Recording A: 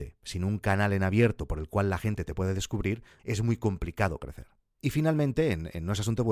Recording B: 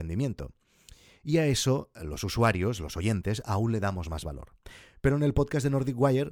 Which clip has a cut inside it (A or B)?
A